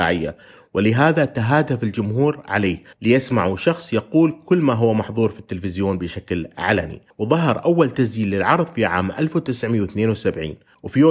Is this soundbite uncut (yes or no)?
no